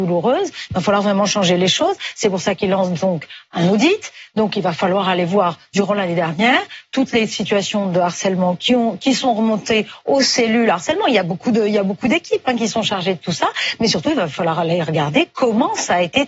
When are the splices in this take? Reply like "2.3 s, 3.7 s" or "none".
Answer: none

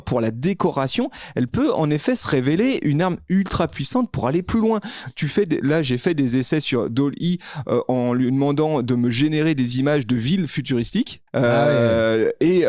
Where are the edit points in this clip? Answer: 11.3 s

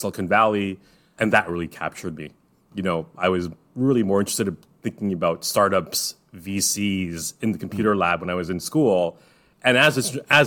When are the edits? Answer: none

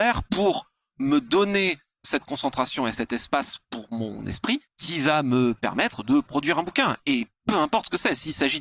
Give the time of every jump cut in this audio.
4.7 s

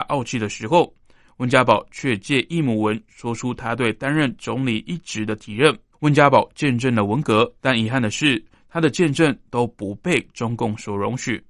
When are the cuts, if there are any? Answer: 5.9 s, 7.6 s

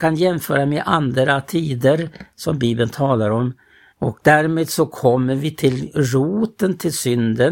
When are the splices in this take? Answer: 3.9 s

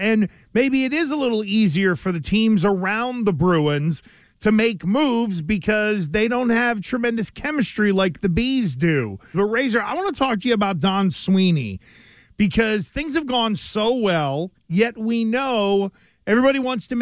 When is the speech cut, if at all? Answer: 9.3 s

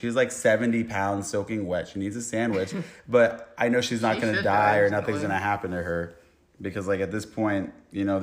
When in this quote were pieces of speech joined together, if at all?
none

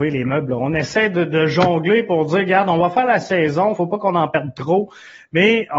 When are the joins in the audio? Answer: 3.8 s

